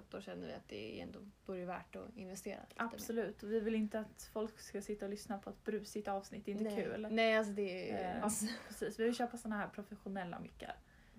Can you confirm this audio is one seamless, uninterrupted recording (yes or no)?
no